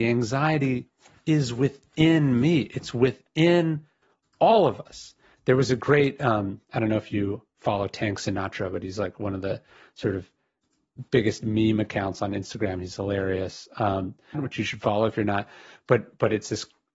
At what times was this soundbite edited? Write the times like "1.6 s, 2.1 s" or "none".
14.3 s